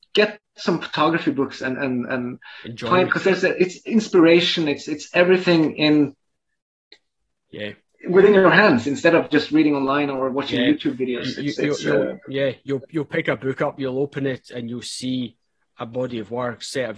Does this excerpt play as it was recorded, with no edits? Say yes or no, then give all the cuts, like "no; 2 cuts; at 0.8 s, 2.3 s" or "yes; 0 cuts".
yes; 0 cuts